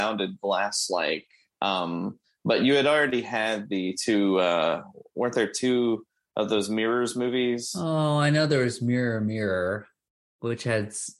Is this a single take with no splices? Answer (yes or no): yes